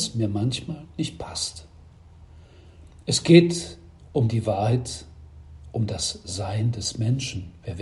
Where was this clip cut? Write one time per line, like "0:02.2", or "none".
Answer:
none